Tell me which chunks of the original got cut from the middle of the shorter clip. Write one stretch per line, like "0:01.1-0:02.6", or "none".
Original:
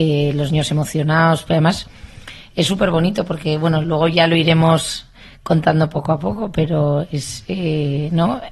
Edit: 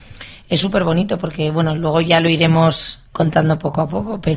0:05.1-0:05.4